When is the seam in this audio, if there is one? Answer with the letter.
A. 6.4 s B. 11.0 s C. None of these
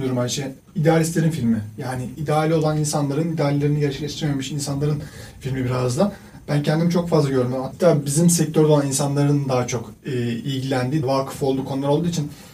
B